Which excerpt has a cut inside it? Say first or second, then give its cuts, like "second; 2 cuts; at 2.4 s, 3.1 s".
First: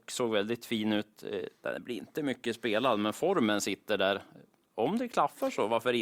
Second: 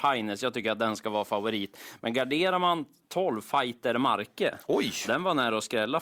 first; 1 cut; at 1.6 s